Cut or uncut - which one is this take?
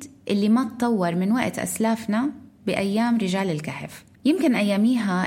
cut